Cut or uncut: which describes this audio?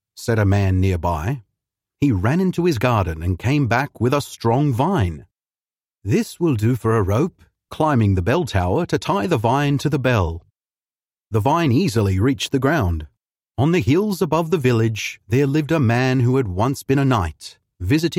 cut